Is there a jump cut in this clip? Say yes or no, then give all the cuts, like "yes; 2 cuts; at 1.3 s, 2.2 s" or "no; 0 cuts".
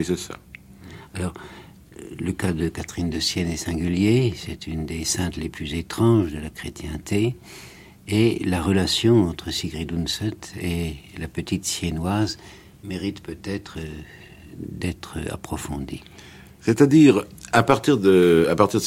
no; 0 cuts